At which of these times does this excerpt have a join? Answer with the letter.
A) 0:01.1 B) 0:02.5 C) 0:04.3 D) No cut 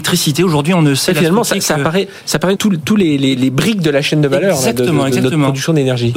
B